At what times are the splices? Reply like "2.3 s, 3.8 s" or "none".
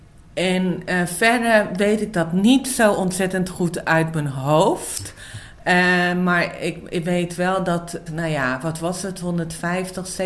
8.1 s